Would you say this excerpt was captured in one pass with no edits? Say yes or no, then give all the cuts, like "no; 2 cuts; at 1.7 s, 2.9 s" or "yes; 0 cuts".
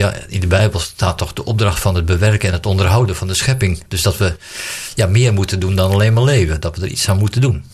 yes; 0 cuts